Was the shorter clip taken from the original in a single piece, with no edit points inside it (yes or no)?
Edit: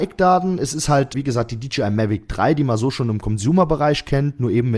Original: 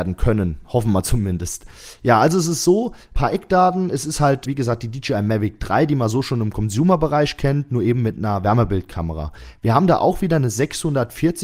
yes